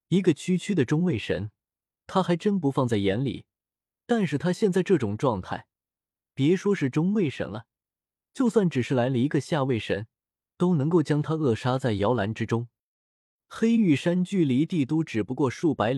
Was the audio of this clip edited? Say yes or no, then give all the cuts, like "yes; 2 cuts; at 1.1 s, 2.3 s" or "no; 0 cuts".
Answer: no; 0 cuts